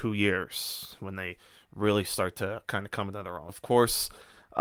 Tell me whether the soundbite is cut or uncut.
cut